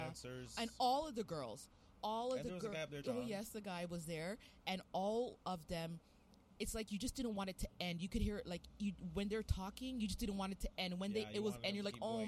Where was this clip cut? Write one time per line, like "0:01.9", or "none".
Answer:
0:03.0